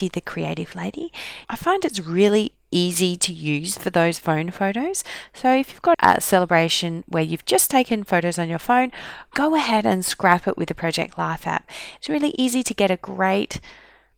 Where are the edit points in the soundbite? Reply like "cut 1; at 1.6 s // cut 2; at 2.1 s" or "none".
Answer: cut 1; at 1.4 s // cut 2; at 5.9 s